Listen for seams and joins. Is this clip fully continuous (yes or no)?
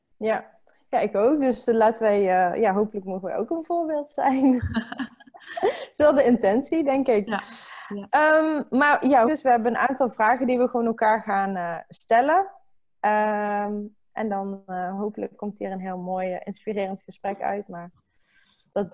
no